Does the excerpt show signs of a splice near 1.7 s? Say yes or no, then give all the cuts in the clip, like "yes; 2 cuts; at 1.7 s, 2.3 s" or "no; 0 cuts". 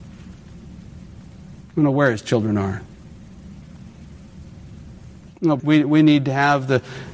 no; 1 cut; at 5.6 s